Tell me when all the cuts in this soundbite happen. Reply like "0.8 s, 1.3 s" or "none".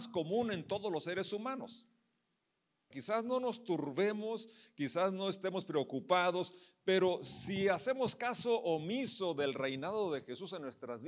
2.9 s